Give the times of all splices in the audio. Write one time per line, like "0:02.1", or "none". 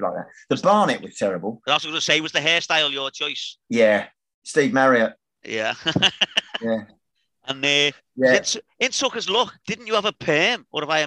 0:03.6
0:09.6